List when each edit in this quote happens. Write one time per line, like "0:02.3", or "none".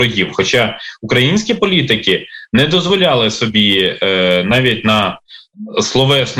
none